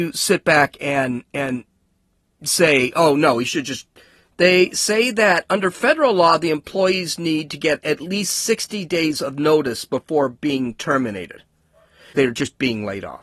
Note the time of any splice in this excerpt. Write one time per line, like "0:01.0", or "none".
0:04.3
0:12.1